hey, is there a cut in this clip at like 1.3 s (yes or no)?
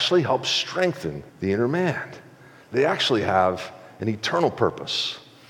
yes